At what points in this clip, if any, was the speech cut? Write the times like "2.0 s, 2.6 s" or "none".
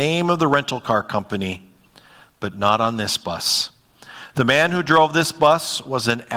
none